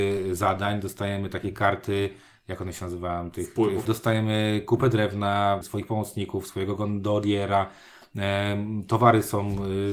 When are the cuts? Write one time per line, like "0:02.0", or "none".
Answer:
0:03.9
0:05.6